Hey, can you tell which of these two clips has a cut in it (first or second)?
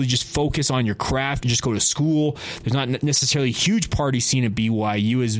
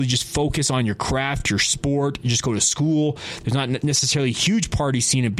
first